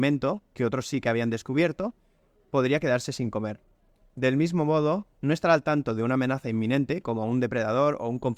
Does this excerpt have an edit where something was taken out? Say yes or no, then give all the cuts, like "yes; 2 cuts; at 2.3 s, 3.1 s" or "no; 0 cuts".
no; 0 cuts